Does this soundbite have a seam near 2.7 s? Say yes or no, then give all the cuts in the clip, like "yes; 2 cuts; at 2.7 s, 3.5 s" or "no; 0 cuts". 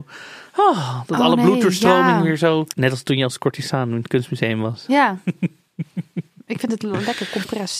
yes; 1 cut; at 2.7 s